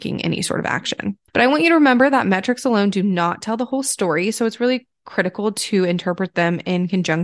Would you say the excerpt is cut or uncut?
uncut